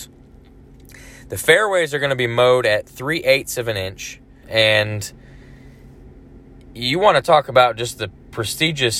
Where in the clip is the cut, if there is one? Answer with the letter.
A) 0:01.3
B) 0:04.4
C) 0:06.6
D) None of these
B